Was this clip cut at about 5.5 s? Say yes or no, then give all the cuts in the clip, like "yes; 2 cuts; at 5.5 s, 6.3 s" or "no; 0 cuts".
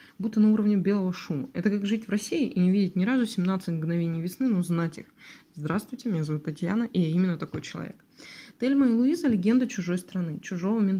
no; 0 cuts